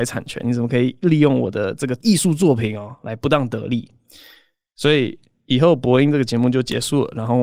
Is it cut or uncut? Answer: uncut